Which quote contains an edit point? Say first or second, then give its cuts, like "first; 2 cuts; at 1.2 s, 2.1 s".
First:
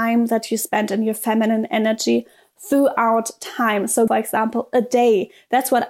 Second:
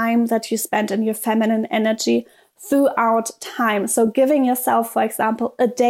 first; 1 cut; at 4.1 s